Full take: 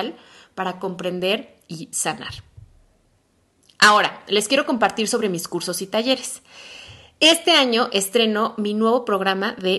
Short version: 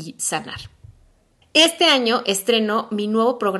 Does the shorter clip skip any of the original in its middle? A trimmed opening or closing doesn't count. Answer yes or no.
yes